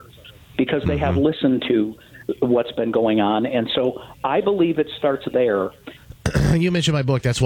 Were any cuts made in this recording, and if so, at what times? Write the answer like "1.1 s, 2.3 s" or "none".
6.0 s